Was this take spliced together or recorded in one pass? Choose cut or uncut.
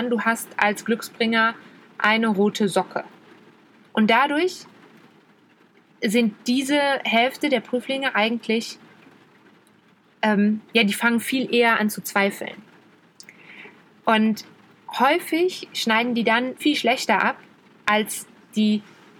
cut